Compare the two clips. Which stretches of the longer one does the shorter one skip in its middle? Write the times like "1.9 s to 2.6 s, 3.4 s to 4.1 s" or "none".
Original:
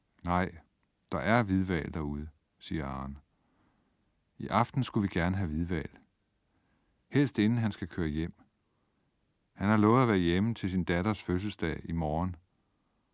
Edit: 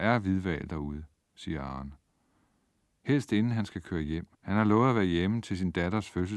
4.2 s to 7.1 s, 8.4 s to 9.5 s